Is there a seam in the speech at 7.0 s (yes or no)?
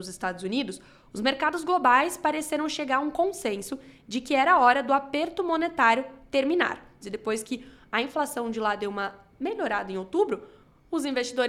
yes